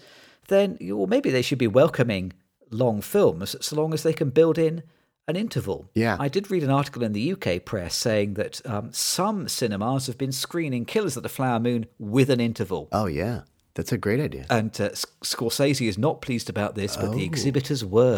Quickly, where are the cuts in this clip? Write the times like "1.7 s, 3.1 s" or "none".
none

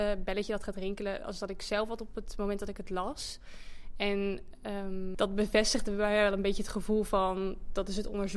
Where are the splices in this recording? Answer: none

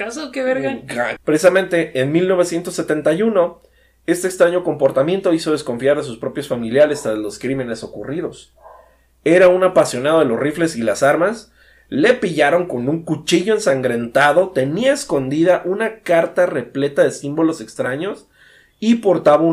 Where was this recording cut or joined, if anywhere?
1.2 s

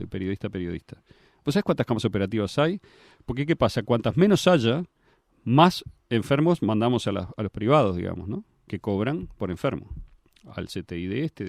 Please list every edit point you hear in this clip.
none

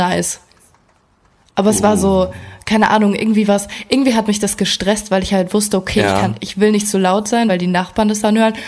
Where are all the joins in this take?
none

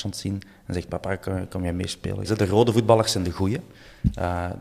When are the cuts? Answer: 2.2 s

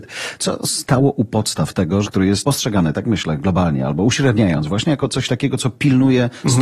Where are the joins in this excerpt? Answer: 2.0 s

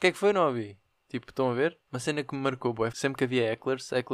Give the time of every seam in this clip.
1.9 s, 2.9 s

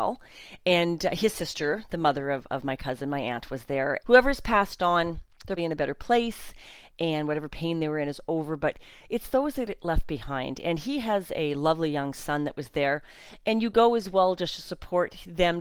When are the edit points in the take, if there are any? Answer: 4.0 s, 5.6 s

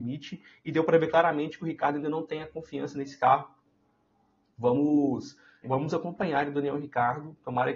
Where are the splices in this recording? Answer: 5.6 s

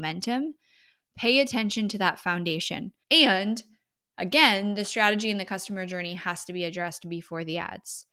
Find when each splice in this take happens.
3.0 s

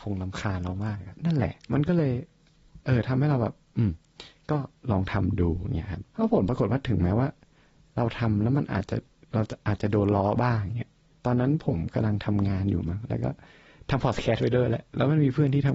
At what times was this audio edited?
1.2 s, 2.8 s, 6.1 s

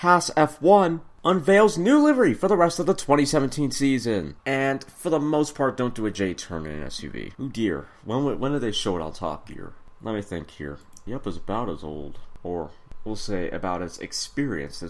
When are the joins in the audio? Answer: 4.4 s, 7.3 s, 11.1 s

